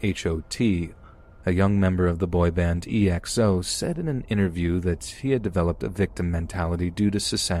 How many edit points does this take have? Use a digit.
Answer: 1